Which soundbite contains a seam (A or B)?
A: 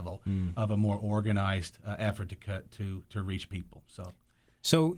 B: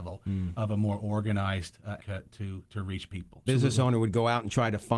B